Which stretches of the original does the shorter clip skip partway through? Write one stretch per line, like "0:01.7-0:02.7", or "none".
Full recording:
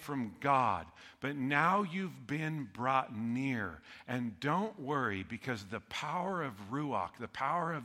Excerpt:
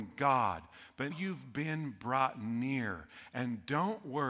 0:01.3-0:01.8